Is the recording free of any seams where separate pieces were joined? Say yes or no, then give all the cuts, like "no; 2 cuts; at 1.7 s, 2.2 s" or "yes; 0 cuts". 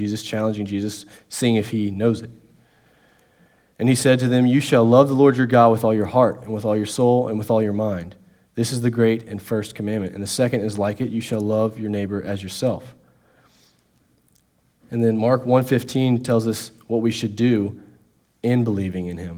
yes; 0 cuts